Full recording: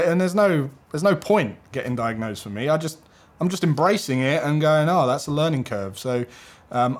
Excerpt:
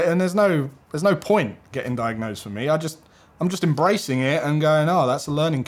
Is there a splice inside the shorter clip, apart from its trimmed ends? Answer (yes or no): no